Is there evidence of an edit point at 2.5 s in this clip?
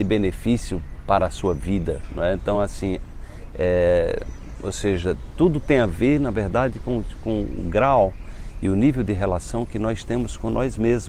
no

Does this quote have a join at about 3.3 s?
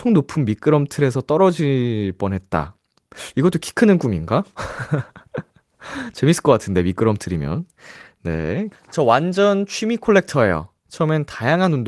no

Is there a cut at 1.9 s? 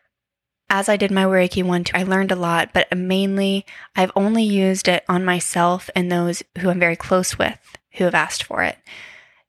yes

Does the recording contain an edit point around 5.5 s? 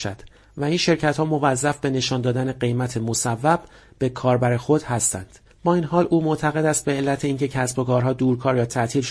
yes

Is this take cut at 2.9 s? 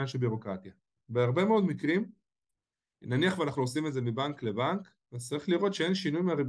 no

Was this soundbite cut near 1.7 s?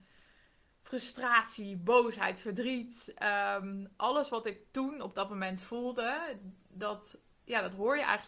no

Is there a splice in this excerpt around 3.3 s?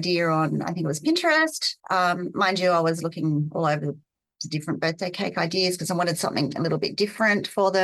no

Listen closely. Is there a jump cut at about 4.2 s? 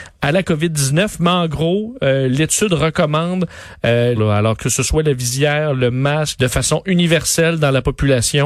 yes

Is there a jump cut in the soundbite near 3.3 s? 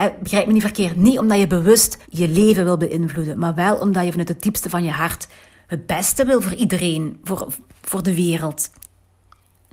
no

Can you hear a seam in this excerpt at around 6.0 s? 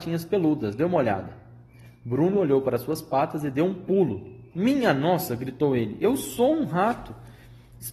no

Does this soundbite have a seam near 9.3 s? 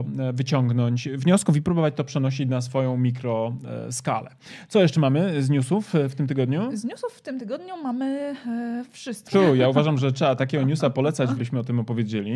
yes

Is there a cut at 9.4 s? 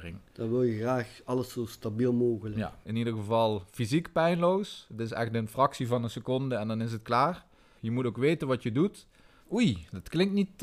yes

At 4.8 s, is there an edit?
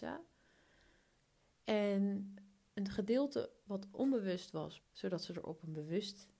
yes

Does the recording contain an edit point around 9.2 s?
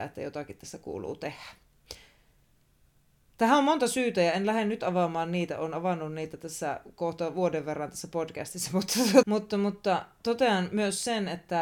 yes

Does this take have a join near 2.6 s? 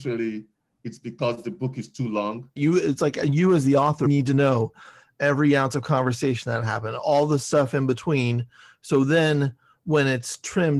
yes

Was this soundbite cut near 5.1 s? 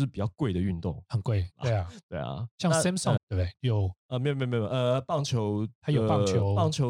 no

